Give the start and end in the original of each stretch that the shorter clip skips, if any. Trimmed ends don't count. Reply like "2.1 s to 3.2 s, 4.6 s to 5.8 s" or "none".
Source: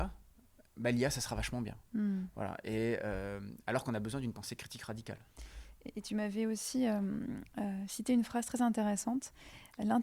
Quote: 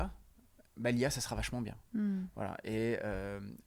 none